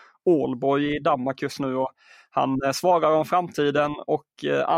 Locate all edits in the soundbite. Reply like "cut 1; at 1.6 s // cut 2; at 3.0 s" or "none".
none